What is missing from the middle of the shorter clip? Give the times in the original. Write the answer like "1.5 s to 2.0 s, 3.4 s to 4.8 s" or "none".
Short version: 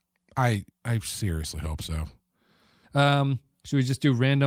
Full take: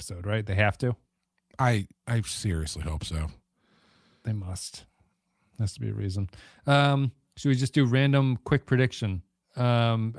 4.1 s to 6.6 s